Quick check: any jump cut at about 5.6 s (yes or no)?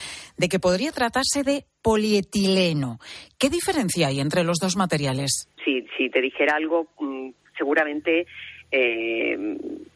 yes